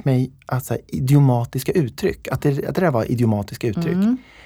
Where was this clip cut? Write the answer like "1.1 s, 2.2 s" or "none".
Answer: none